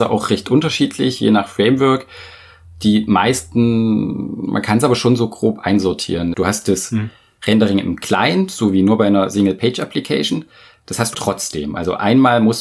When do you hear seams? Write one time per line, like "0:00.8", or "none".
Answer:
0:06.3
0:11.1